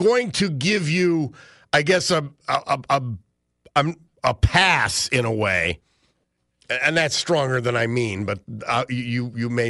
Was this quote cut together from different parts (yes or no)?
no